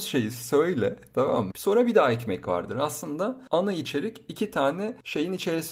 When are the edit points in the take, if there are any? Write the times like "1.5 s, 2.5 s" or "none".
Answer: 1.5 s